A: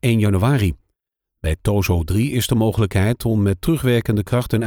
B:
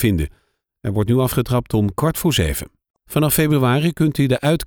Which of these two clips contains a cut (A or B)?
B